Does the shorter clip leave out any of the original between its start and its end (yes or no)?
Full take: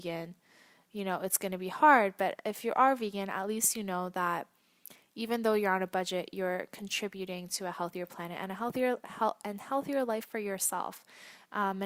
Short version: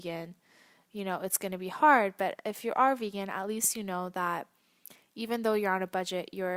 no